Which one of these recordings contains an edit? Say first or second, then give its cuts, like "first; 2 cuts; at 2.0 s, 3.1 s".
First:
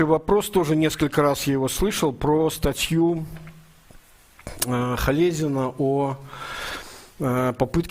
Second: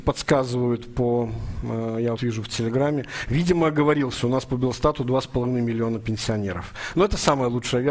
second; 1 cut; at 2.2 s